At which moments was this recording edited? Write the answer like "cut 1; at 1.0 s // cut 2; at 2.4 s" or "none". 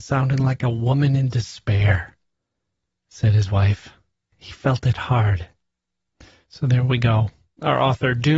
cut 1; at 4.3 s